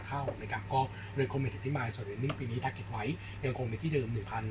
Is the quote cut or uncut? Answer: uncut